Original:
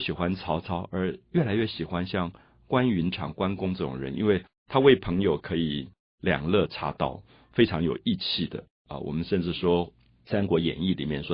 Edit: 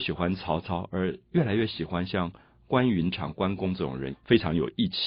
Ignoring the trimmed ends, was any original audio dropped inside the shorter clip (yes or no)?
yes